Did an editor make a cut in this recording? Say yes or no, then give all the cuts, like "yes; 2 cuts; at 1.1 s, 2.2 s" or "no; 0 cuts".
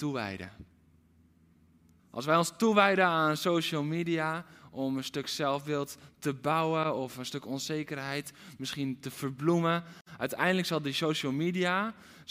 yes; 1 cut; at 2.0 s